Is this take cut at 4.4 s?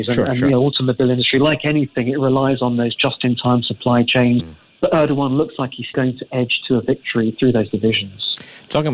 yes; 2 cuts; at 4.4 s, 5.9 s

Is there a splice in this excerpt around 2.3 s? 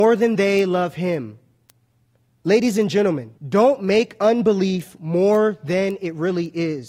yes; 2 cuts; at 2.3 s, 3.4 s

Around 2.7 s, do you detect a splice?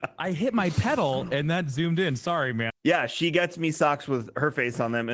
yes; 1 cut; at 2.7 s

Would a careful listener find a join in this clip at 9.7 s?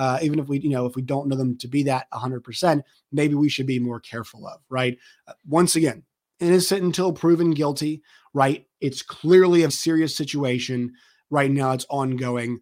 yes; 1 cut; at 9.7 s

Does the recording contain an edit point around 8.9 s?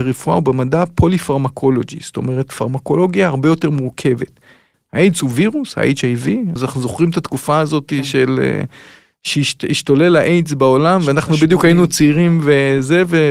no; 2 cuts; at 4.7 s, 6.6 s

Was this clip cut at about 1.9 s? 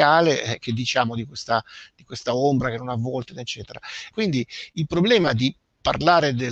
no; 1 cut; at 4.1 s

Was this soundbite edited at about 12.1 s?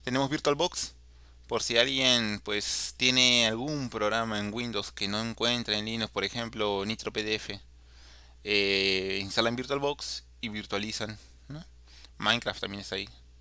yes; 1 cut; at 12.1 s

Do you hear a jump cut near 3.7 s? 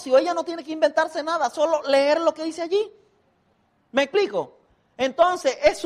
no; 0 cuts

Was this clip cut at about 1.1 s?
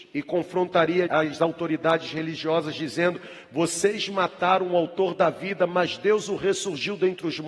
yes; 1 cut; at 1.1 s

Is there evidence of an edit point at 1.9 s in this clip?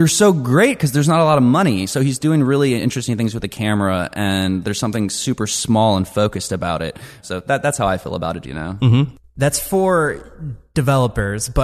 no; 2 cuts; at 7.2 s, 8.4 s

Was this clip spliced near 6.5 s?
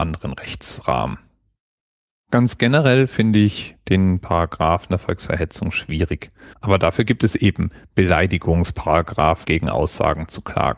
yes; 2 cuts; at 6.5 s, 9.4 s

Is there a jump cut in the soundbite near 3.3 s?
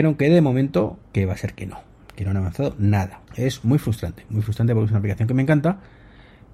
yes; 1 cut; at 3.3 s

